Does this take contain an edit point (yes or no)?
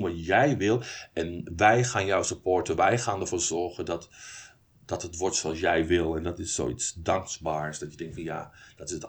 no